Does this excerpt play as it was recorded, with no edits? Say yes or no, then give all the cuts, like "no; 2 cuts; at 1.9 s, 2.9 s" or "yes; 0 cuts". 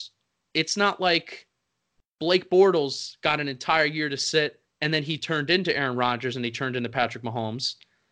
yes; 0 cuts